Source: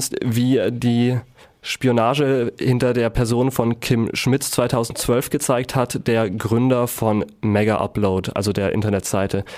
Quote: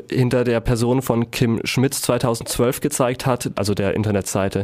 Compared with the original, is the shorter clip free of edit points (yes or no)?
no